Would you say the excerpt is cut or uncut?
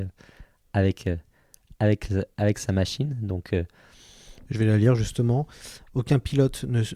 uncut